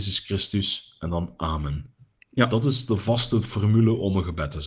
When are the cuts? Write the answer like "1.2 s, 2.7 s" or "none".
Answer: none